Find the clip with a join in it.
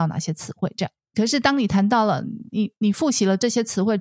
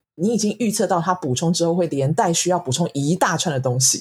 first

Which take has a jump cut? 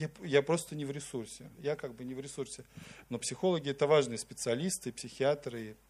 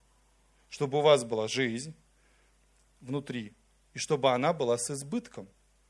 first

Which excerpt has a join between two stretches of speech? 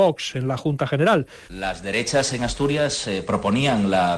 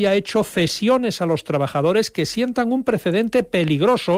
first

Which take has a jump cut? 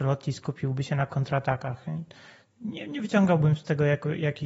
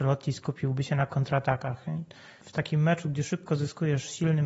second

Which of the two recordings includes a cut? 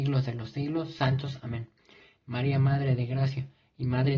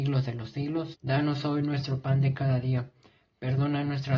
second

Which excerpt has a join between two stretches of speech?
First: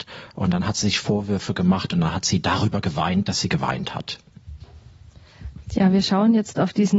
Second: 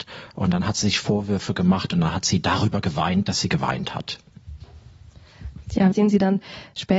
second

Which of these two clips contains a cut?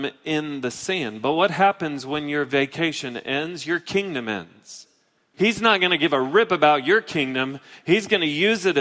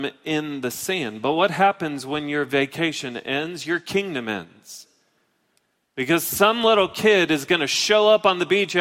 first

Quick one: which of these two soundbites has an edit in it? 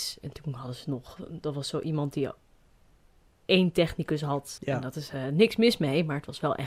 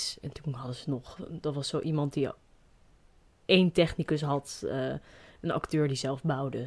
first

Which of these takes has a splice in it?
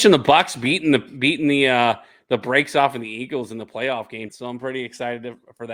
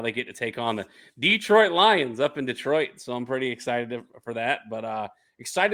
first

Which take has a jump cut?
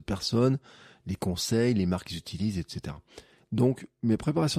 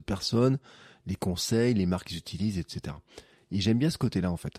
first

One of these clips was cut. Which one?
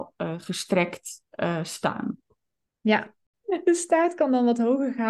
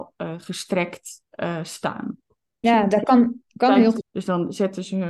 second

